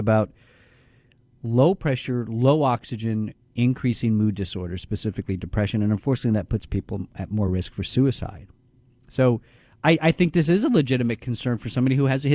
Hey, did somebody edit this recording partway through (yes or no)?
no